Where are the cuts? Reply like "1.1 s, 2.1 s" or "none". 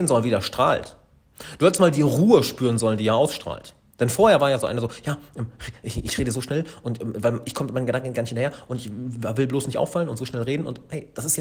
none